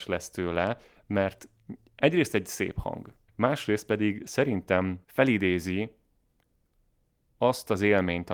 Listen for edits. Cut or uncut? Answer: cut